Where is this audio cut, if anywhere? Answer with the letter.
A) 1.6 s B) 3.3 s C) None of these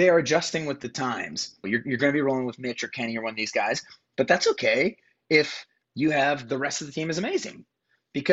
A